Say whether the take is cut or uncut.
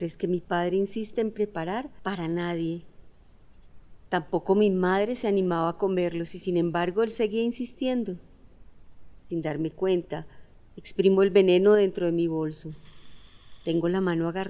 cut